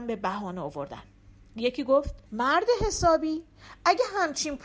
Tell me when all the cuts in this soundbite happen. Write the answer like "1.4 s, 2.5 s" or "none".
2.3 s